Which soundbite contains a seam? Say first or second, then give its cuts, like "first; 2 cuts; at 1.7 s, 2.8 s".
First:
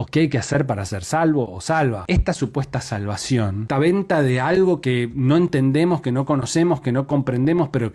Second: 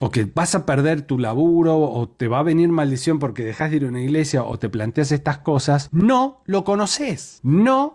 first; 1 cut; at 6.8 s